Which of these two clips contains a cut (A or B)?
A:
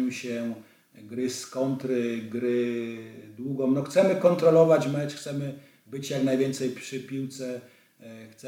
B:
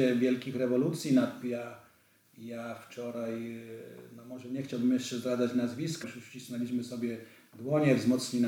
B